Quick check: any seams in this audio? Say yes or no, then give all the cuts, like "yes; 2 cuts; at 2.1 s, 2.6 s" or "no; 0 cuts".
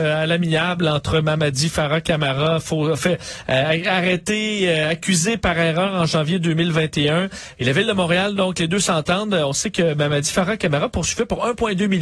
no; 0 cuts